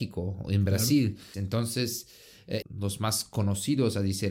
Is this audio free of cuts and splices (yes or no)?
no